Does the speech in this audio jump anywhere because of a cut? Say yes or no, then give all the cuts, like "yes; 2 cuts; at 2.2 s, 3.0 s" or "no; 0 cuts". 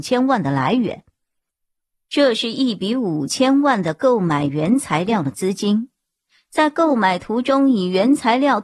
no; 0 cuts